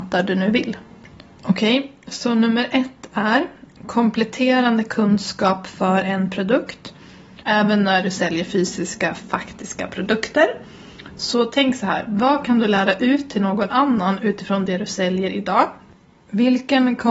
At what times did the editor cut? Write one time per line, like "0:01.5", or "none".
0:07.4